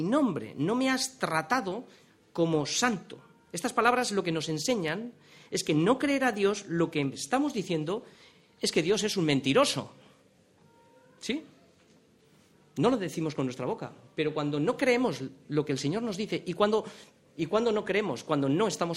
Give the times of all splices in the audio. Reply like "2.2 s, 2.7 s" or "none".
none